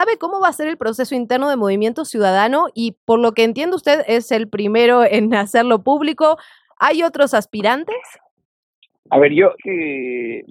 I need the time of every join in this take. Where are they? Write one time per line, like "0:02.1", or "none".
0:09.6